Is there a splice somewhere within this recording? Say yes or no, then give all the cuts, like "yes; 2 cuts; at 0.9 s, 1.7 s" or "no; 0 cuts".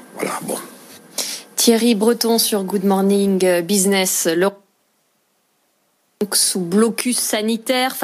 no; 0 cuts